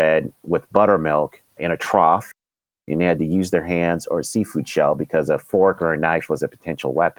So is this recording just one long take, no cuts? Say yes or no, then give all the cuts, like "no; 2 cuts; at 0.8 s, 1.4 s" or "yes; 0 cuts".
yes; 0 cuts